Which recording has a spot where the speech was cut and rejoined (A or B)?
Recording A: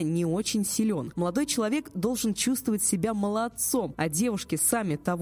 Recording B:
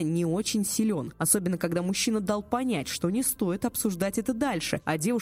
A